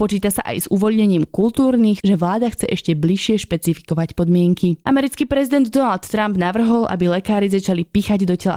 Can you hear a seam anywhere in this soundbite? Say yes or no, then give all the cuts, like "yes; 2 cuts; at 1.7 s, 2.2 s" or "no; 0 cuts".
yes; 2 cuts; at 2.0 s, 4.8 s